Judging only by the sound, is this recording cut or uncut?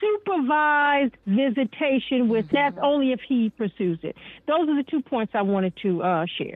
cut